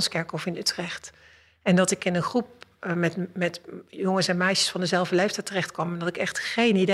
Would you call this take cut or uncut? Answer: uncut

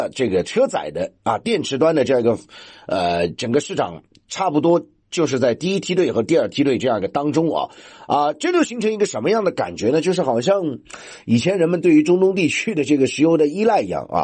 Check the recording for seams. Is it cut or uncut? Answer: uncut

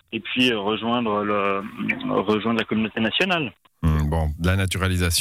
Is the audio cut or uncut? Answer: uncut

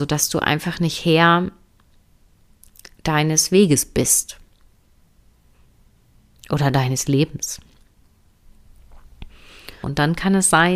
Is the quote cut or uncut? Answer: cut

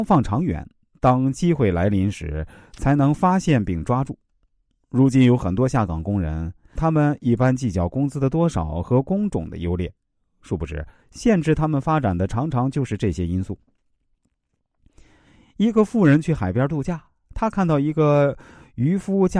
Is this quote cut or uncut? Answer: cut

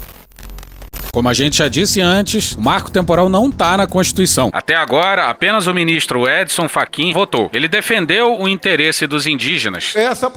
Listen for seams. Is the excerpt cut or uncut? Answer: cut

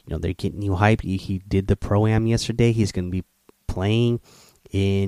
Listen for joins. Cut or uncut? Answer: uncut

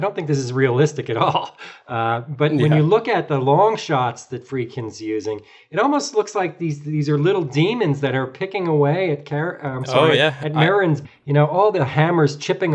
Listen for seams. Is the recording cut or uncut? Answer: cut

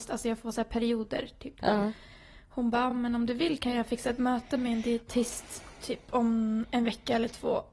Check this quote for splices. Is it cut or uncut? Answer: uncut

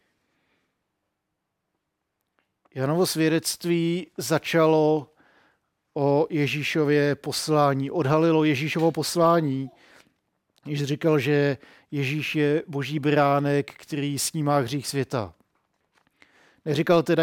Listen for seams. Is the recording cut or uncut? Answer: uncut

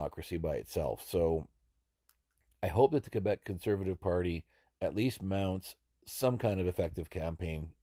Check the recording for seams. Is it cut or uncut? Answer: uncut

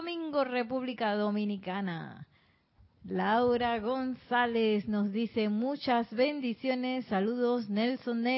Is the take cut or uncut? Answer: uncut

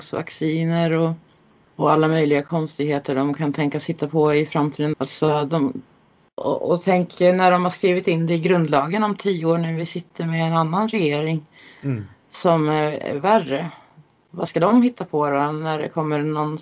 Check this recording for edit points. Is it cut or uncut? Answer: cut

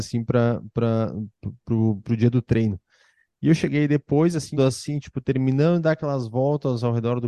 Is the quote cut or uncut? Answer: cut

